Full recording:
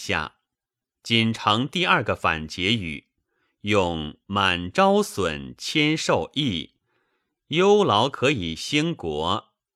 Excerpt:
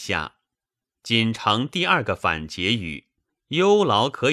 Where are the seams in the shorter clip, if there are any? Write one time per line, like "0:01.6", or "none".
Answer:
0:03.3